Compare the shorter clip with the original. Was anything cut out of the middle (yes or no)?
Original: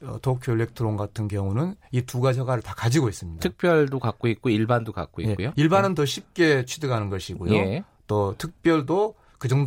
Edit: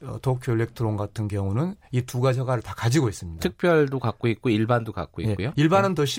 no